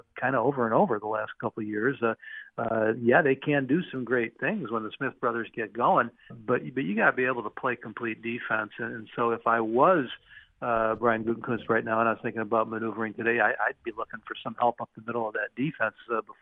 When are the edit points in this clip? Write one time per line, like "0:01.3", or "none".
0:06.3